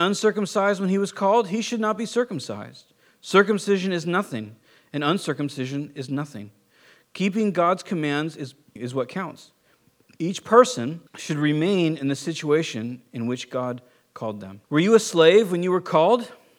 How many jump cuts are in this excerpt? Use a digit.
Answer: 3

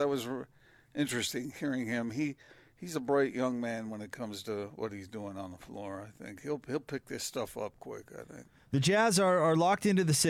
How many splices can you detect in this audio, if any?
0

